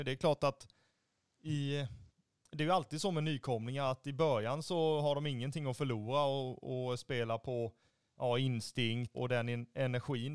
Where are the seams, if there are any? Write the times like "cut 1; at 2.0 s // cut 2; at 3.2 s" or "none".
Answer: cut 1; at 9.1 s